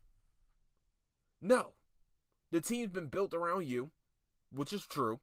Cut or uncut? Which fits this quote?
uncut